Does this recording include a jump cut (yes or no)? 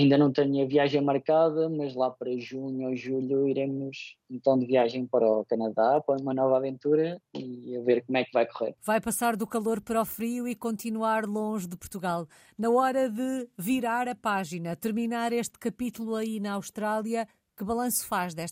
yes